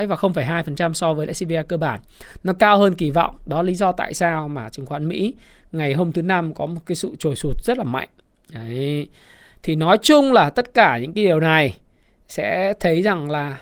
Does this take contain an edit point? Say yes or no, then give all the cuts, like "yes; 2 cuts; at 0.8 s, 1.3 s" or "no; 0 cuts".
no; 0 cuts